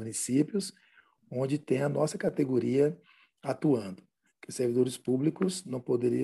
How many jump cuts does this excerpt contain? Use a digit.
1